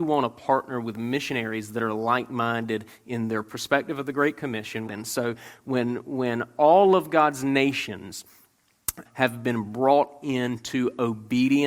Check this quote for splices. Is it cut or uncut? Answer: cut